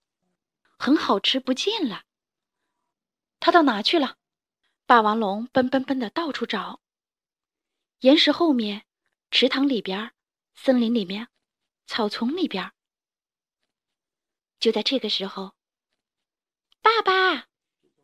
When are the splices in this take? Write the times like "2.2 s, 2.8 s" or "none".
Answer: 14.4 s